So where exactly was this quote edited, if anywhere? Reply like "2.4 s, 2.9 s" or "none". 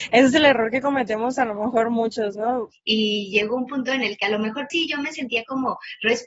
2.7 s, 4.7 s